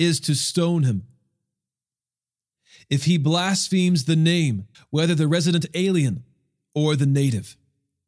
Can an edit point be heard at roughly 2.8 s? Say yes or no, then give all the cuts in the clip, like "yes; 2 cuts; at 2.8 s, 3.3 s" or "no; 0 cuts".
no; 1 cut; at 4.7 s